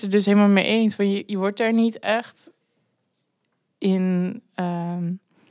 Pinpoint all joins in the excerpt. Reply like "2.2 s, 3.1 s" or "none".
none

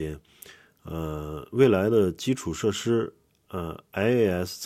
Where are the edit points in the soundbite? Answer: none

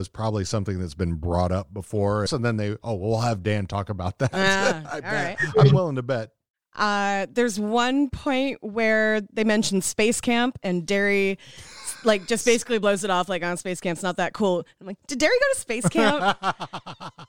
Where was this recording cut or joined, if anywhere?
2.3 s

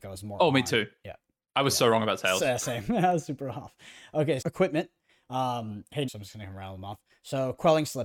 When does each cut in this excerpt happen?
4.4 s, 6.1 s

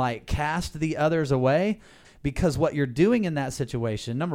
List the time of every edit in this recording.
2.0 s

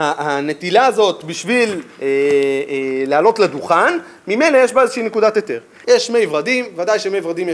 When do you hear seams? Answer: 5.8 s

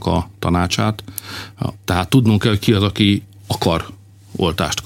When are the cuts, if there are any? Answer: 1.7 s

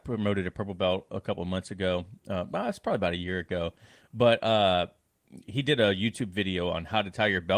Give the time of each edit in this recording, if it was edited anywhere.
none

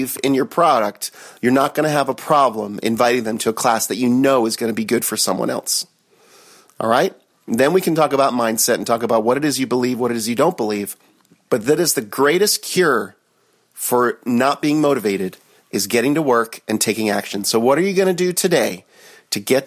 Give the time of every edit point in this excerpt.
11.5 s

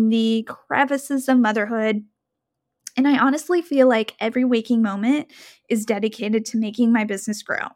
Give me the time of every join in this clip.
none

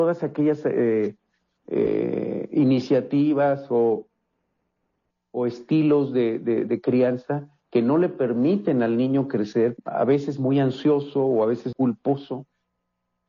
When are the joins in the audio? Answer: 9.8 s, 11.7 s

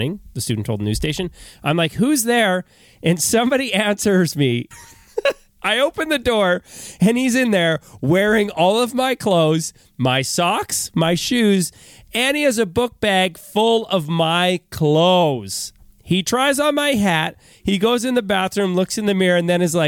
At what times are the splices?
4.7 s

